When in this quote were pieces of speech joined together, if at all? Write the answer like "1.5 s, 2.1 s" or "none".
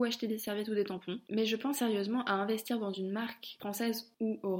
1.2 s